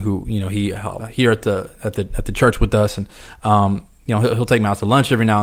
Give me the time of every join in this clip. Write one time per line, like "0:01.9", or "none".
0:01.0